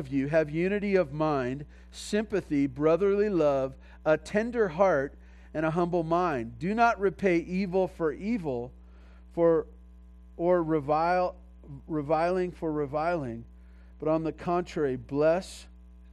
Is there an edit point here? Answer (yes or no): no